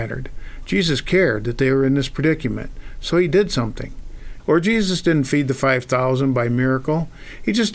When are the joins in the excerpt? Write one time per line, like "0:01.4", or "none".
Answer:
0:04.4